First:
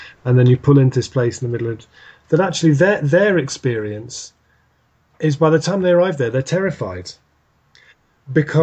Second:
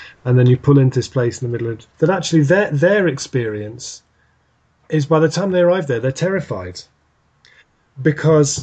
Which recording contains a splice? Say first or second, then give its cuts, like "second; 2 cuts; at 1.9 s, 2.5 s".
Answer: second; 1 cut; at 1.9 s